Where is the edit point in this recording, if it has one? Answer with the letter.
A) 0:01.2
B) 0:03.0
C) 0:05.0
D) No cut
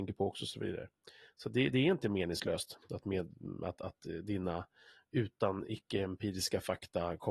D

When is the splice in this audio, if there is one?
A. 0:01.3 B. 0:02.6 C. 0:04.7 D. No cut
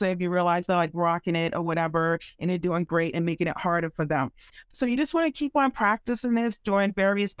C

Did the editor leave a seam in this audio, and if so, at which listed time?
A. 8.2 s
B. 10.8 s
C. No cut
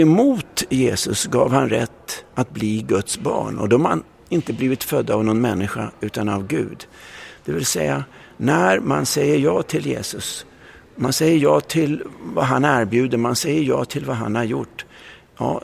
C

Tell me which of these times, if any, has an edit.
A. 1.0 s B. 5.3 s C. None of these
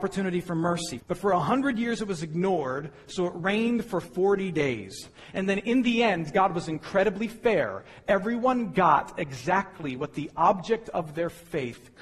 A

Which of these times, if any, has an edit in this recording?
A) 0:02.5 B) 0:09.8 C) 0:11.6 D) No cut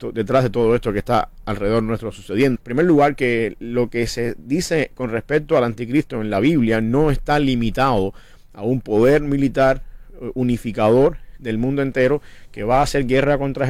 A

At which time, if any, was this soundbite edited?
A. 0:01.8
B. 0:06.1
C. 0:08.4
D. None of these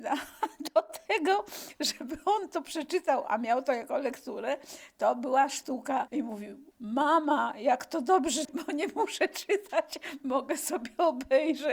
C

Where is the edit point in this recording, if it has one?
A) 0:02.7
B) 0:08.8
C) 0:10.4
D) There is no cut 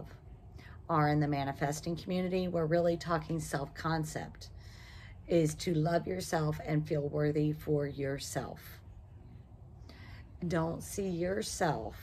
C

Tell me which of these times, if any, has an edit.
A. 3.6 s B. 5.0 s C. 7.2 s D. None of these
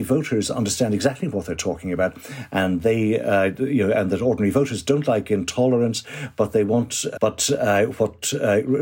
C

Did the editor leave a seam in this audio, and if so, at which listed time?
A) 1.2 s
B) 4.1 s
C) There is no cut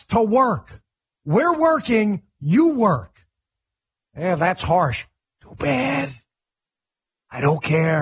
B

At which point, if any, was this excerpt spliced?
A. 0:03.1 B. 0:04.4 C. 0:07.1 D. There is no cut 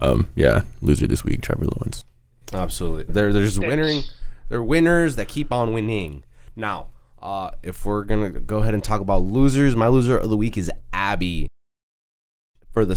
A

